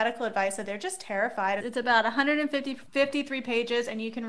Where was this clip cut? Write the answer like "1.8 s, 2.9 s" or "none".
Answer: 1.6 s, 2.9 s